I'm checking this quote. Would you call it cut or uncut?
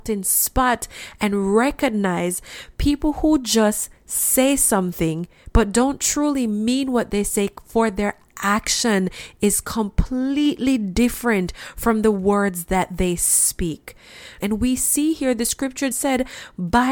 cut